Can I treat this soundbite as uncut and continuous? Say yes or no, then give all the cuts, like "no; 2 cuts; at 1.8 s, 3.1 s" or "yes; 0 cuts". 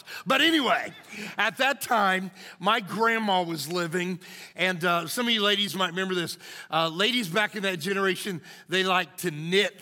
yes; 0 cuts